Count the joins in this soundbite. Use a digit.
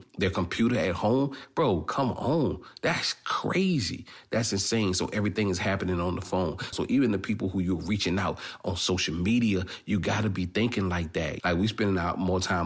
2